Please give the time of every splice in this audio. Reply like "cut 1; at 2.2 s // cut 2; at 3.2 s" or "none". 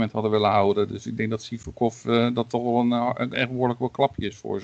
cut 1; at 3.3 s